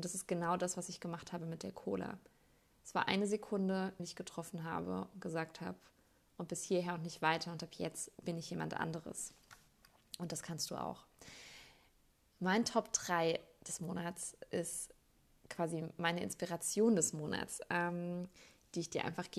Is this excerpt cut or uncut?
cut